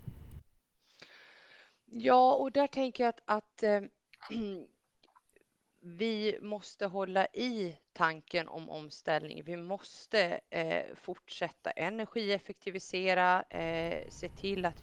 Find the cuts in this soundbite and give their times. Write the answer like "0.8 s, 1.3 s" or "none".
none